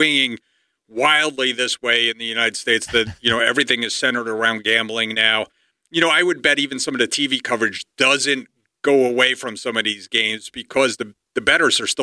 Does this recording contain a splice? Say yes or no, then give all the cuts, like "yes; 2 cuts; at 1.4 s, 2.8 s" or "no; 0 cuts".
no; 0 cuts